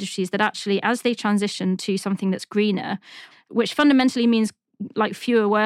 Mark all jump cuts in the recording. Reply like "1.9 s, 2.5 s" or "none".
3.3 s

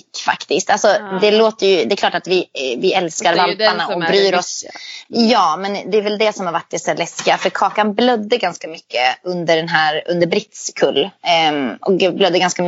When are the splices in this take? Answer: none

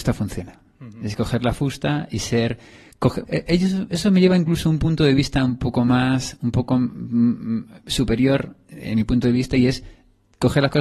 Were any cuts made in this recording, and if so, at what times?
3.2 s

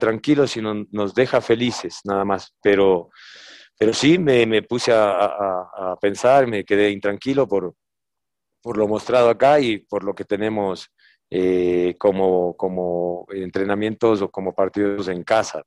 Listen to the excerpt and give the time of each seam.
none

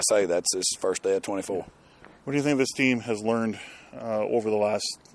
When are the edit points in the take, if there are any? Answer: none

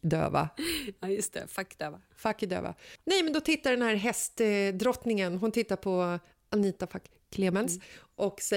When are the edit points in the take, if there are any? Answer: none

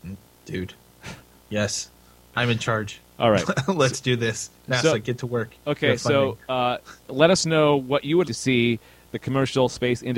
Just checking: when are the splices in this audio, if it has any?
7.0 s, 8.2 s

